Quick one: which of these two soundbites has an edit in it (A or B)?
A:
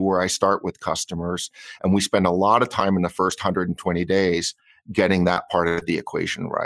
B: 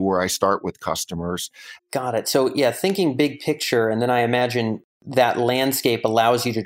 B